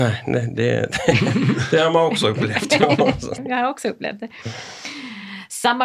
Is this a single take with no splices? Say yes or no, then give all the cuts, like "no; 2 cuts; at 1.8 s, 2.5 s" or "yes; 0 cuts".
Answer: no; 1 cut; at 3.4 s